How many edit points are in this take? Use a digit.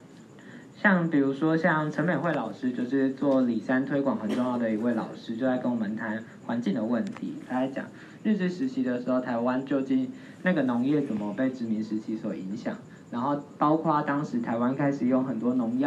1